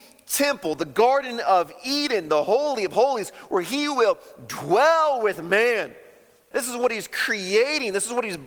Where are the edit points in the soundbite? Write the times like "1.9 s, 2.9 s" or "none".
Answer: 6.5 s